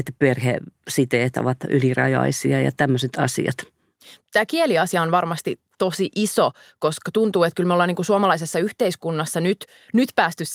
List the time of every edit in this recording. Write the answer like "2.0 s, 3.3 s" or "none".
none